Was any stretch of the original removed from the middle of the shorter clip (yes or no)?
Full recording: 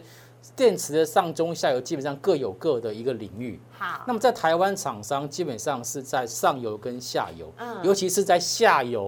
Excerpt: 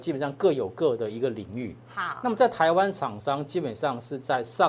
no